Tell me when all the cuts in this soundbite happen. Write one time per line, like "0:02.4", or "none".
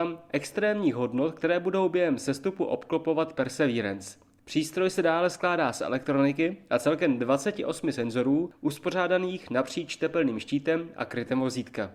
none